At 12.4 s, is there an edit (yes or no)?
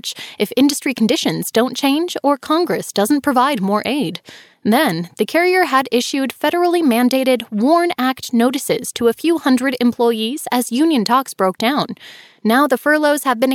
no